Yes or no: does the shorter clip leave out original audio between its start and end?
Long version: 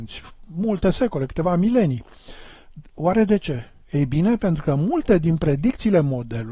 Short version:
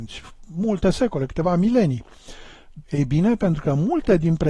yes